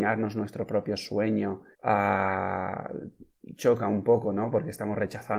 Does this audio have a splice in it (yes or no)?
yes